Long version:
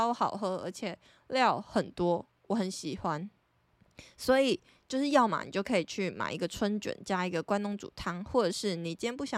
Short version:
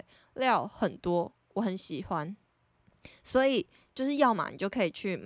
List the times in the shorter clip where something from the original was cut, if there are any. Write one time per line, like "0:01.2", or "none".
none